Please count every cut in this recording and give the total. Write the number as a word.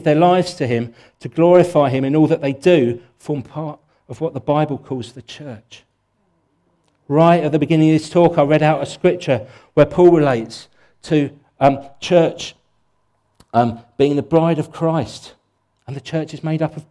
zero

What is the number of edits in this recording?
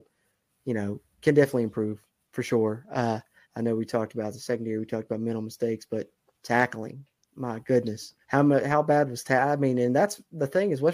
two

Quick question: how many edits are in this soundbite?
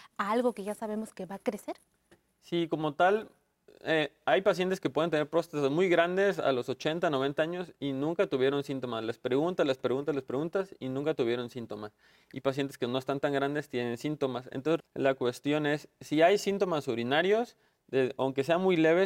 one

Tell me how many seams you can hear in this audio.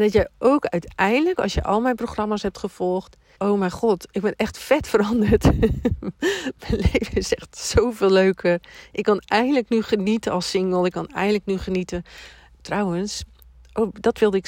one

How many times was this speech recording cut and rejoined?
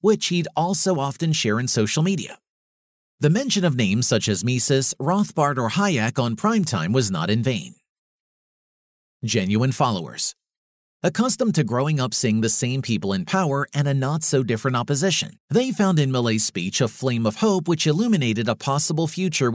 two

